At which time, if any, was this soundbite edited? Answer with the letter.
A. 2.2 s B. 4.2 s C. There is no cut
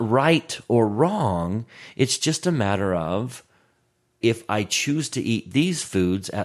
B